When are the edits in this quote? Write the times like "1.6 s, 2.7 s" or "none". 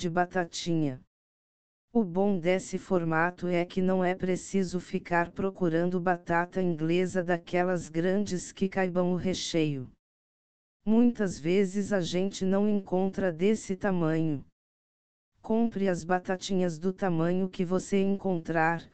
none